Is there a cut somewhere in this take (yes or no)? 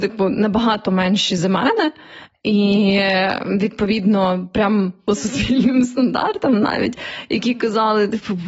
yes